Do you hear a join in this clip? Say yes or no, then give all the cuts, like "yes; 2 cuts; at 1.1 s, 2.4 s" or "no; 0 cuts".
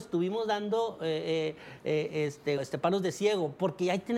yes; 1 cut; at 2.6 s